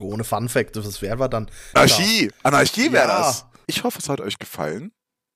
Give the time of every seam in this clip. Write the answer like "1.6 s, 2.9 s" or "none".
1.8 s, 3.6 s